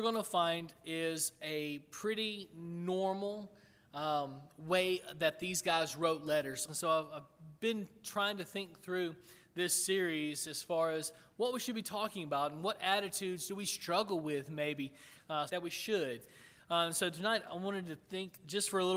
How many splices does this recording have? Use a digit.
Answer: 2